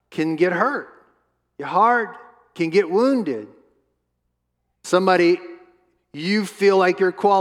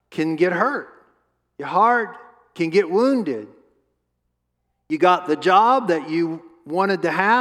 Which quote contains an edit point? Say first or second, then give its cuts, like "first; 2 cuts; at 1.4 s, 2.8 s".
first; 1 cut; at 4.8 s